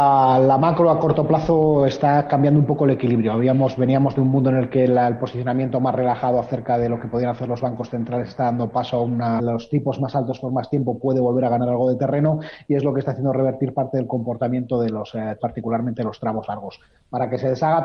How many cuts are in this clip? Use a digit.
2